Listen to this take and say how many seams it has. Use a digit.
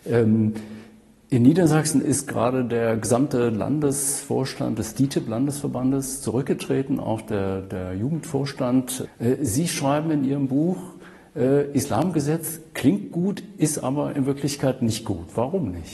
1